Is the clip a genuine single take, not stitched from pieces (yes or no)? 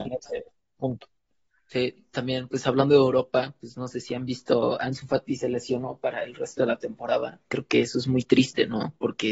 yes